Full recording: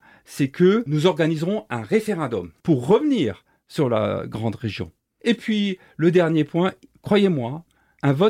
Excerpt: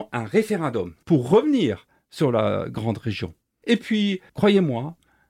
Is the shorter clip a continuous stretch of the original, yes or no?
no